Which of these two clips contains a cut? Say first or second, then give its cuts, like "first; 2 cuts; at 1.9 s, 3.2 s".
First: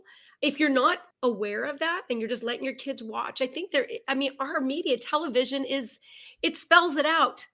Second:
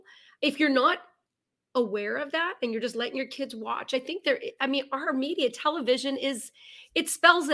first; 1 cut; at 1.1 s